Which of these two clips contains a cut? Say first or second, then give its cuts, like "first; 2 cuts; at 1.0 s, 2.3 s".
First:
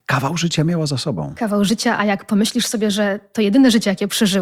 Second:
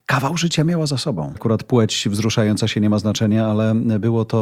second; 1 cut; at 1.3 s